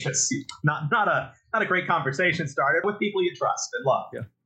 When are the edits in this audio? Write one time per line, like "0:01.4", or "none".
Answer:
0:02.8